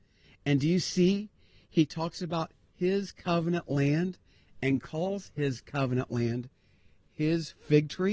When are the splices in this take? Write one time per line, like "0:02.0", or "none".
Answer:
none